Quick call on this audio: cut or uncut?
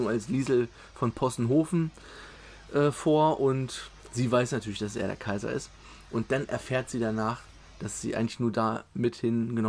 uncut